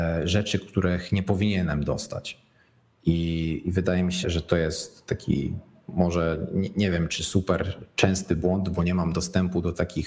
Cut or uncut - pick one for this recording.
cut